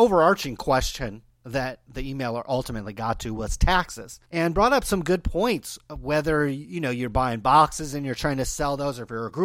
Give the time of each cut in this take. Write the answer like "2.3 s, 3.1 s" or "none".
1.9 s, 4.2 s